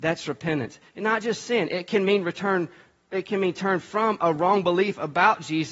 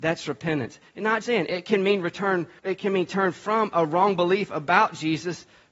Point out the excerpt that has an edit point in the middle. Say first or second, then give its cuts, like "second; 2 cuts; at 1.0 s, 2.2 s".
second; 2 cuts; at 1.2 s, 2.6 s